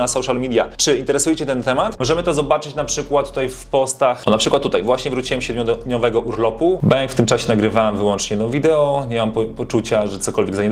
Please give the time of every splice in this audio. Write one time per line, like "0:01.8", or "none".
0:02.0